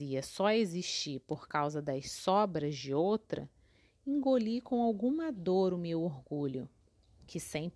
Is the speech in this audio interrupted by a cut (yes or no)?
no